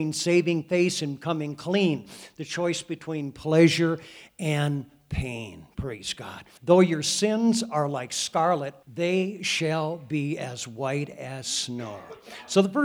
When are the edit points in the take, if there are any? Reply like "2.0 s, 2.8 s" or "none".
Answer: 6.6 s, 8.8 s